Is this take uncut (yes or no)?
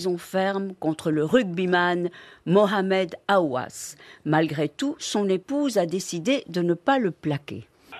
yes